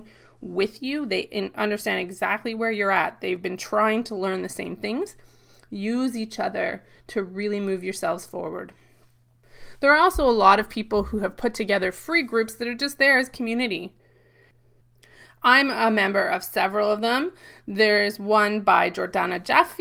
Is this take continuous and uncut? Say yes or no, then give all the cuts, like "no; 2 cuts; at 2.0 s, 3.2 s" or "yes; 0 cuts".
yes; 0 cuts